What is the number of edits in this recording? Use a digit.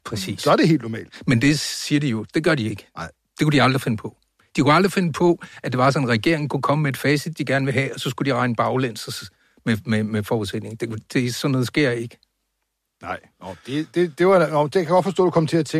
0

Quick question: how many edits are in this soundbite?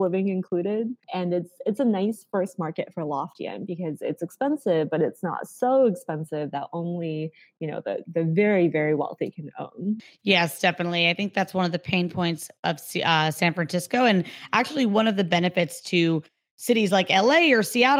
0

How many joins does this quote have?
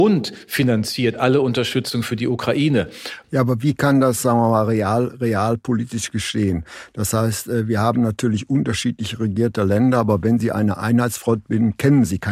1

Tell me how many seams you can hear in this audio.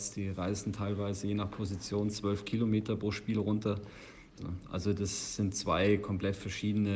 1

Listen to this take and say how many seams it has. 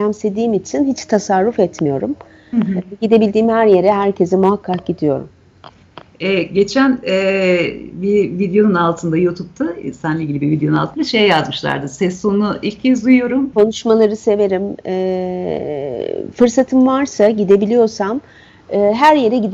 1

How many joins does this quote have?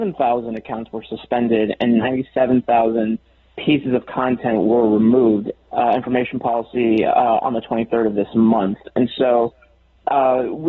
1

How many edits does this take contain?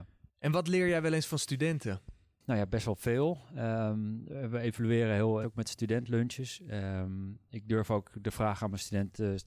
1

